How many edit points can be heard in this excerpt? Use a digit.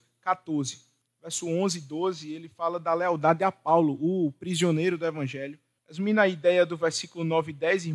2